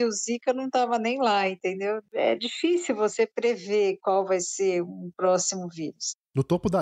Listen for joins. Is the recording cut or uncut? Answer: uncut